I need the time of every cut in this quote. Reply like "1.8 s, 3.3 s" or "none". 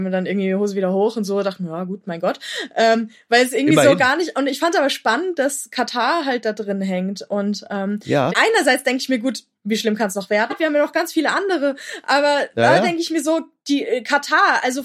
8.3 s, 10.5 s